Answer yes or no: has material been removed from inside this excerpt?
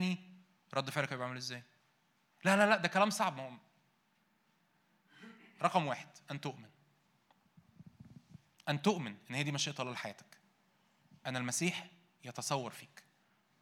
no